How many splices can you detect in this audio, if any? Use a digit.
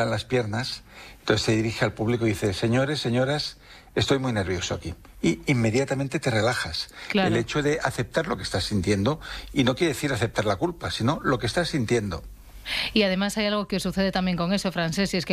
0